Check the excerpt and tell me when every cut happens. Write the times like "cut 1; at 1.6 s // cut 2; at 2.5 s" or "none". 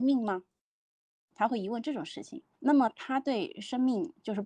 cut 1; at 2.5 s